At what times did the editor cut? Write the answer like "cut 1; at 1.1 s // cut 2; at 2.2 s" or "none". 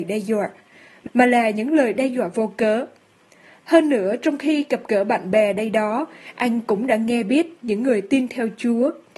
none